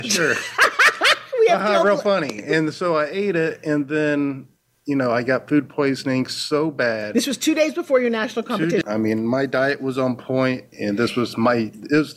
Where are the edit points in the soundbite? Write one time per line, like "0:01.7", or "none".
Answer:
0:08.8
0:10.7

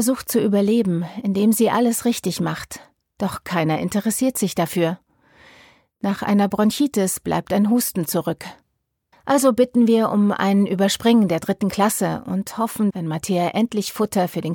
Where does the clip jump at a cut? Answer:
0:09.1
0:12.9

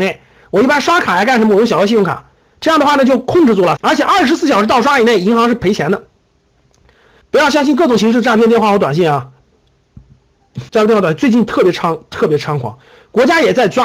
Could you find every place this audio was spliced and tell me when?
0:03.8
0:07.2
0:10.7

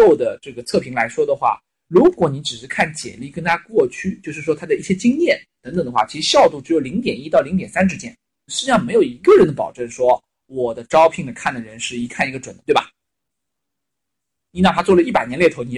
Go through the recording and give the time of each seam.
0:08.5

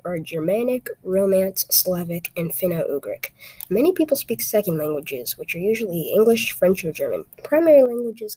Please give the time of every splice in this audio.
0:07.3

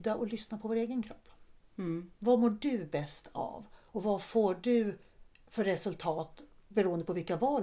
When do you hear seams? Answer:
none

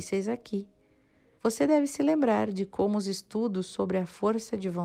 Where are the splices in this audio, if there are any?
0:01.4

